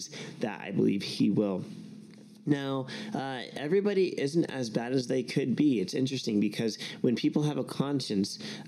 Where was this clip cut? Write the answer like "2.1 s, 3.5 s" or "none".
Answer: none